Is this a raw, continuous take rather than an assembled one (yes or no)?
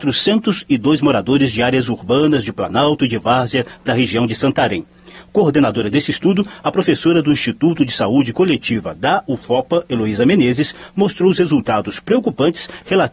yes